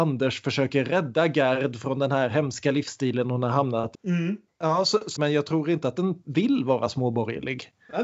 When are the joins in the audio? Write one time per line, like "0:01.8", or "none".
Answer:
0:03.9
0:05.2